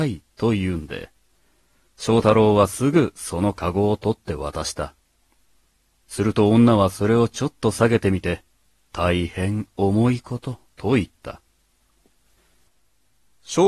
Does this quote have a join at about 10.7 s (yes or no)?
yes